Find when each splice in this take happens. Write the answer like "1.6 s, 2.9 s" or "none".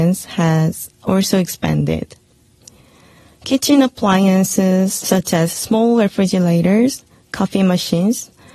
none